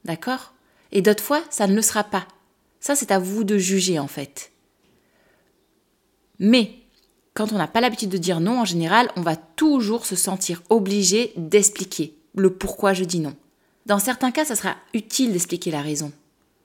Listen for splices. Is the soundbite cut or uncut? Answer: cut